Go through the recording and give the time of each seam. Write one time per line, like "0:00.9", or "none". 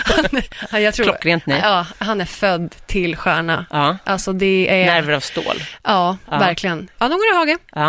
0:07.0